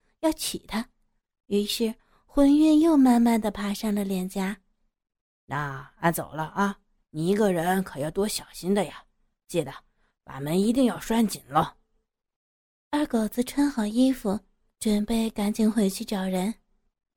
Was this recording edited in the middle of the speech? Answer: yes; 1 cut; at 7.0 s

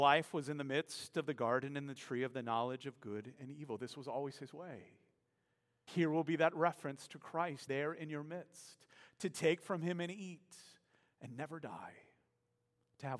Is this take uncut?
no; 2 cuts; at 5.9 s, 7.7 s

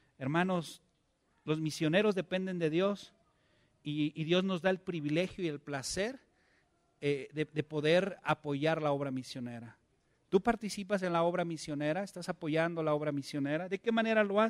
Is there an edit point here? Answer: no; 0 cuts

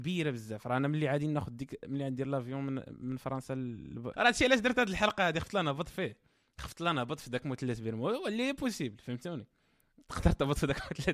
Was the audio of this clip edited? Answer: yes; 1 cut; at 4.1 s

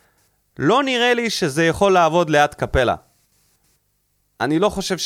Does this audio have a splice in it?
no; 0 cuts

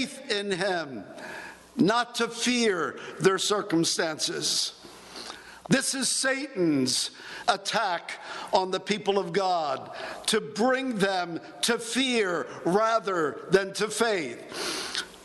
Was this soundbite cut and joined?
yes; 1 cut; at 5.6 s

